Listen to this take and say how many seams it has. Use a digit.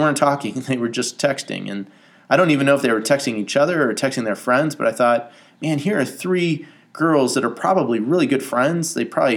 0